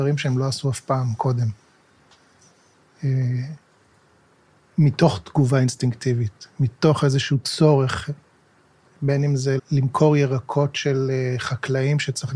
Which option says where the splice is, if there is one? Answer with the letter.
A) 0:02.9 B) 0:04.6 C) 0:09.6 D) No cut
C